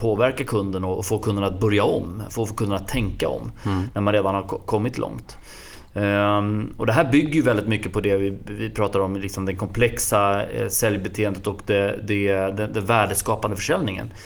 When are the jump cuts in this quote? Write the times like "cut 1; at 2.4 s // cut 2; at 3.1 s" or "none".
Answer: none